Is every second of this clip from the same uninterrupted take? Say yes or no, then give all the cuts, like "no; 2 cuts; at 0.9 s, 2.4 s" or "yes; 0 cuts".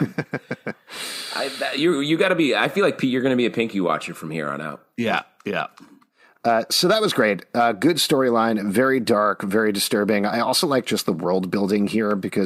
yes; 0 cuts